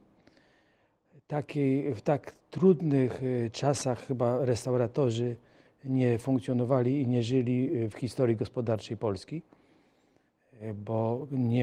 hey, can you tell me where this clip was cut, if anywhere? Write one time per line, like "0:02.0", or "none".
none